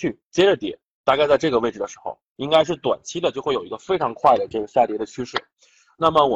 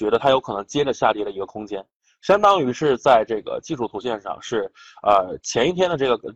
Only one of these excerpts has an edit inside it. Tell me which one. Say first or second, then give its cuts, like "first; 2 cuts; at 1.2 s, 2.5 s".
first; 1 cut; at 2.3 s